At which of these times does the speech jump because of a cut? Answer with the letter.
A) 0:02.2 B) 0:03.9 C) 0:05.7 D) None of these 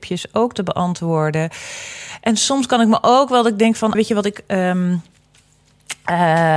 B